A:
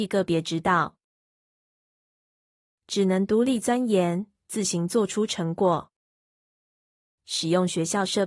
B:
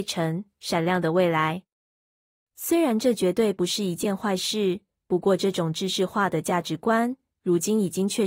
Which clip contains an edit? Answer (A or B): A